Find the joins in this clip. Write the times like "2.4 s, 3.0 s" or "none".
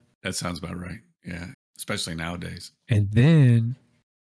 1.5 s